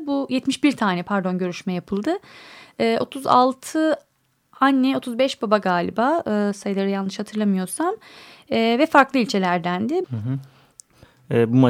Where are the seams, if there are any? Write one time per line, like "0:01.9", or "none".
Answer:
0:10.0